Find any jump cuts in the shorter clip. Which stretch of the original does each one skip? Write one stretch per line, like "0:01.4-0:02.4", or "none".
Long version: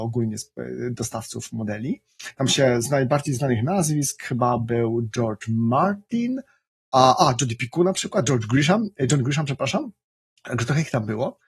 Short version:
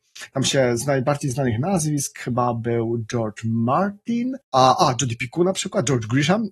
0:06.5-0:06.8